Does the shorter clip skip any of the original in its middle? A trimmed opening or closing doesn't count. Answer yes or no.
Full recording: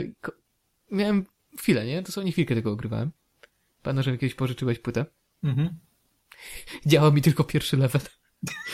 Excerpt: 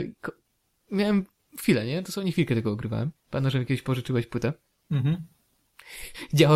yes